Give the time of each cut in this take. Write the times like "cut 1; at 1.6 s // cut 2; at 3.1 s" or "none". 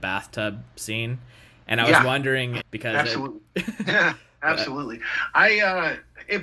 cut 1; at 2.6 s

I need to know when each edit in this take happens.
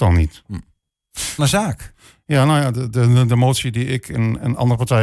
cut 1; at 1.4 s

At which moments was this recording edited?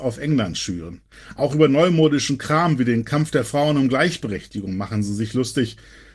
none

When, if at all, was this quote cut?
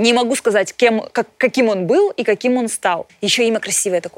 cut 1; at 3.1 s

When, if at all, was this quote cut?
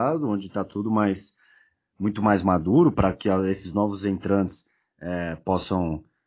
none

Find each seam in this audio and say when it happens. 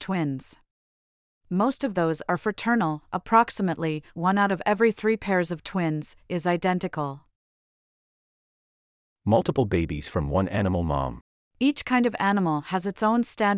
none

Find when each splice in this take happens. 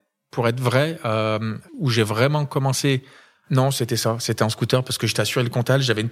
cut 1; at 1.7 s

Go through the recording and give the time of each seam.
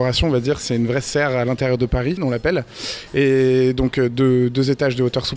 cut 1; at 2.2 s

